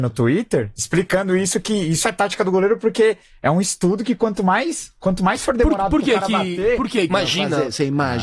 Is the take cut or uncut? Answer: cut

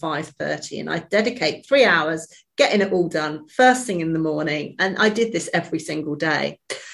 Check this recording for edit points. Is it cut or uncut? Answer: uncut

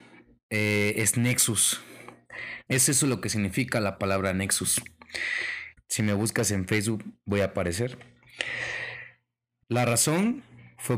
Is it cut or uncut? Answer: cut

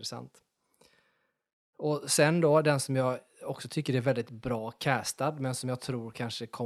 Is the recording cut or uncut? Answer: uncut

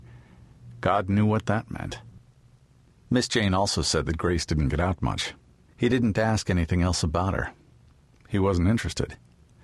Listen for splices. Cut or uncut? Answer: cut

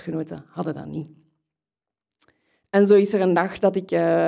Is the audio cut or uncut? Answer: uncut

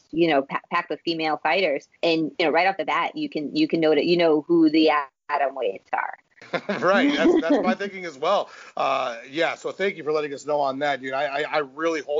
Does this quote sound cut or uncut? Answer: cut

